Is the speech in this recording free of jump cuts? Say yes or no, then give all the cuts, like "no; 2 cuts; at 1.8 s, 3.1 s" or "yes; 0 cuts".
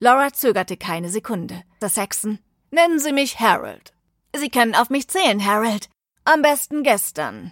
no; 2 cuts; at 1.8 s, 6.2 s